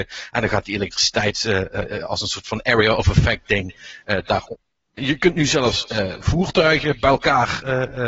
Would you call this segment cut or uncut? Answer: cut